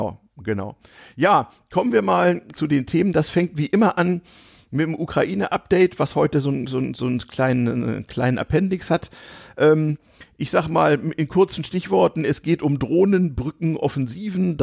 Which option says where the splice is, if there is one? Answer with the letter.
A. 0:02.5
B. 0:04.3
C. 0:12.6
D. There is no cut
A